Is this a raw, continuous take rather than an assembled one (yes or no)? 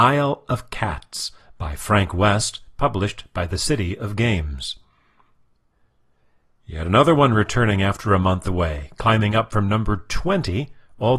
yes